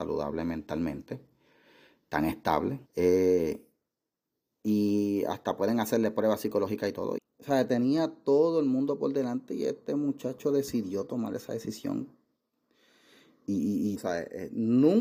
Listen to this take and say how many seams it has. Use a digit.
3